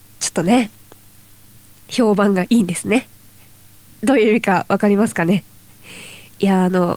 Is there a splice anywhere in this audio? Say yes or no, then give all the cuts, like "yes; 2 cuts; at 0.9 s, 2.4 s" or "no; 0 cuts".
yes; 1 cut; at 2.5 s